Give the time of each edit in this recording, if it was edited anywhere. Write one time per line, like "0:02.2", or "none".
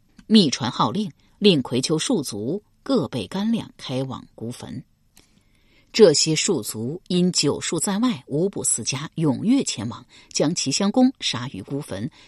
none